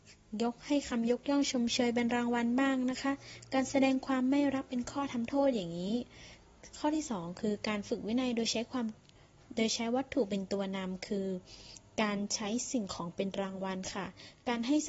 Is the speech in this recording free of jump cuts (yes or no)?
yes